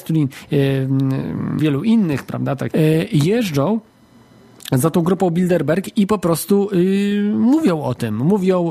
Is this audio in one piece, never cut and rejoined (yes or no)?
no